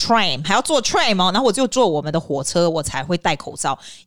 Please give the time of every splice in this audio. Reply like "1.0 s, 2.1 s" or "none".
none